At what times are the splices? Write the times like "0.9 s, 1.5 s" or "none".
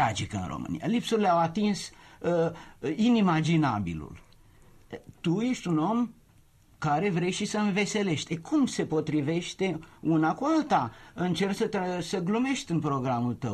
none